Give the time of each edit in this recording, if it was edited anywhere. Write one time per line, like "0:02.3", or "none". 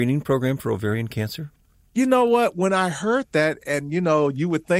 none